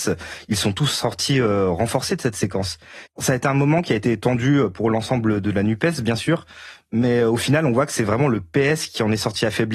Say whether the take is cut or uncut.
cut